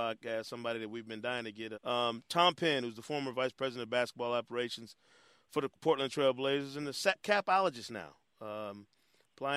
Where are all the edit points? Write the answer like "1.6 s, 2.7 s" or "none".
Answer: 1.7 s, 7.2 s